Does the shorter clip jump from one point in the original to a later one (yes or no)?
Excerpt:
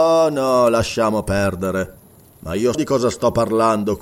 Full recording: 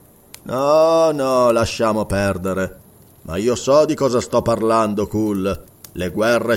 yes